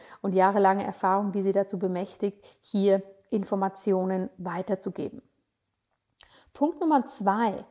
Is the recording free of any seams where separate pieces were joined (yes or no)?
yes